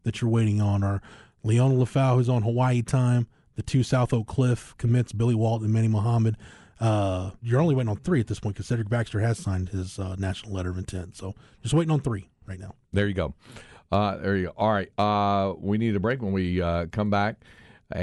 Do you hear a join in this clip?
yes; 1 cut; at 7.4 s

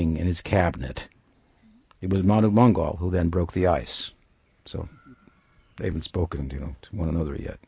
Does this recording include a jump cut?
no; 0 cuts

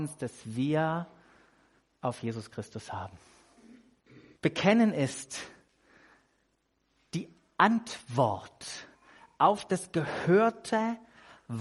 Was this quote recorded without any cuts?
no; 1 cut; at 4.4 s

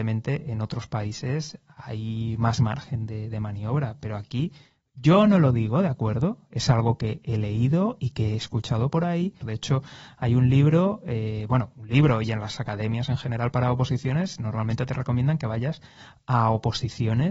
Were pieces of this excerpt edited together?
yes; 1 cut; at 9.4 s

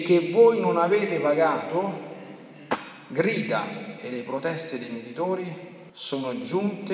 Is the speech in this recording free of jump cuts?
no; 1 cut; at 5.9 s

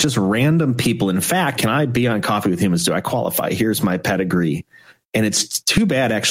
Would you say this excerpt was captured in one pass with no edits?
no; 1 cut; at 1.6 s

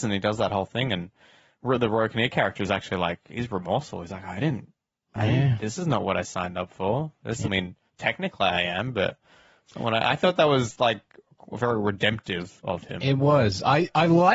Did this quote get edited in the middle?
yes; 1 cut; at 7.4 s

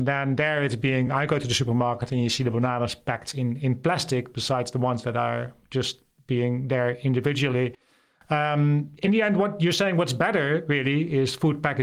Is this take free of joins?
yes; 0 cuts

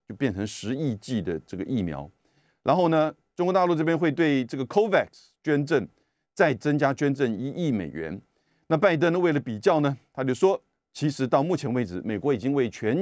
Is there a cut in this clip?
no; 0 cuts

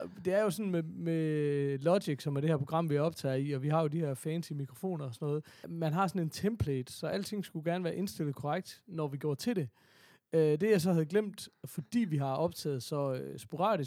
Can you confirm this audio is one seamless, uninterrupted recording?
no; 1 cut; at 5.6 s

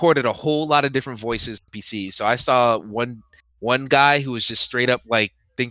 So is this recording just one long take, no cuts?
no; 1 cut; at 1.6 s

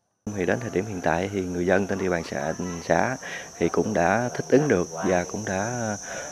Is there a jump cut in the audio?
no; 0 cuts

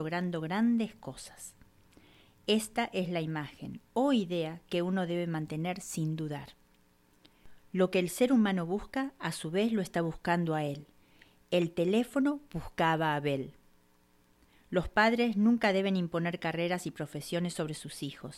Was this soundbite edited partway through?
no; 0 cuts

